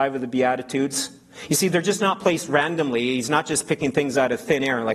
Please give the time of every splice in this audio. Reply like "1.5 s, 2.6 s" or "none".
none